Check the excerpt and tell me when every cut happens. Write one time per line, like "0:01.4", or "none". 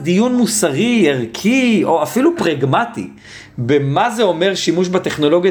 none